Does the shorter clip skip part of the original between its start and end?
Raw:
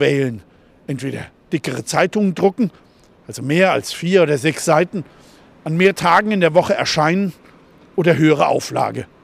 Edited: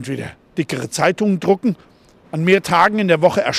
yes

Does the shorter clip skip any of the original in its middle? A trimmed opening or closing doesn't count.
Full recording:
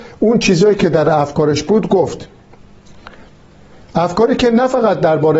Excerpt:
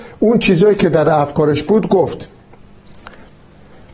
no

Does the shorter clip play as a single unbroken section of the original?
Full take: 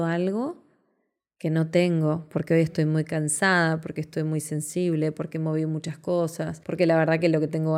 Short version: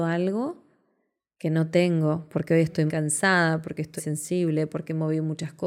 no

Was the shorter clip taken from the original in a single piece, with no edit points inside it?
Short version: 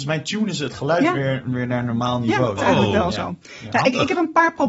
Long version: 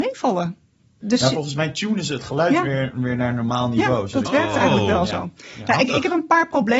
no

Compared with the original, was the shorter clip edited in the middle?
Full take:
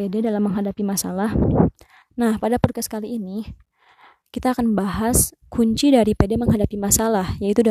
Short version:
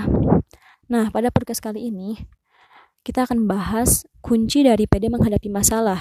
no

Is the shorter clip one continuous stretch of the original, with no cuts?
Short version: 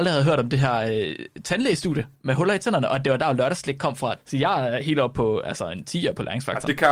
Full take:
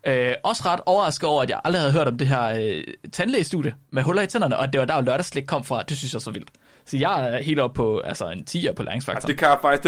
no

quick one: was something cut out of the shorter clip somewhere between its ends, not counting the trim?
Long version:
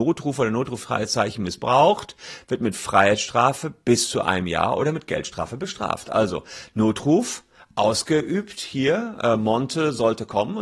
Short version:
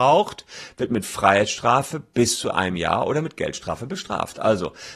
no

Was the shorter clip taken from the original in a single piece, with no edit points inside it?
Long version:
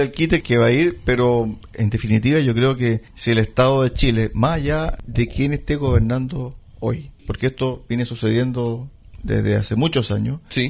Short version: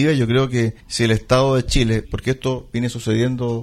no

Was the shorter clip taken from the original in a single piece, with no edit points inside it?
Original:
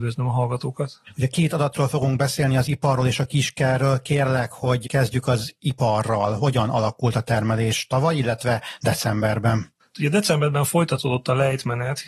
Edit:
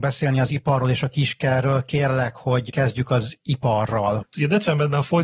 no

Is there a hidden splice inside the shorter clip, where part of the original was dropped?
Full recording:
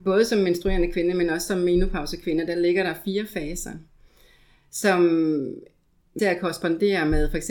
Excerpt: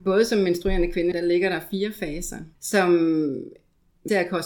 yes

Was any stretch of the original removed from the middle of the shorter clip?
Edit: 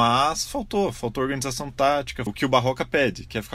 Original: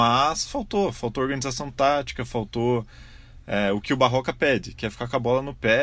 yes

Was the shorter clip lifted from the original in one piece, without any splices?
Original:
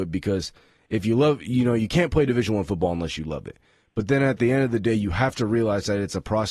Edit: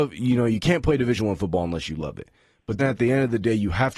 no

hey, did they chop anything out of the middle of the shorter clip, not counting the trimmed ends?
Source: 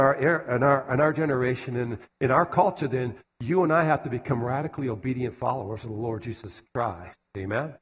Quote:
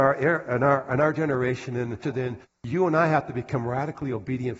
yes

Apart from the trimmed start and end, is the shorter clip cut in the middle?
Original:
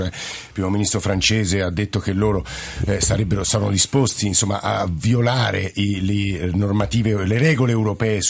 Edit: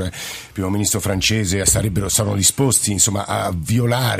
yes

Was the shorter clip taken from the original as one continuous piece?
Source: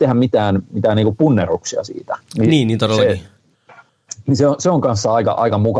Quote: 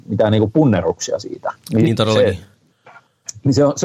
no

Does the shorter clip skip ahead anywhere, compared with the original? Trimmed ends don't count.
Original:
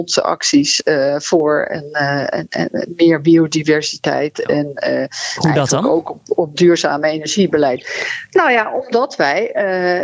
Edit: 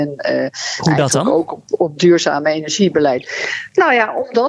no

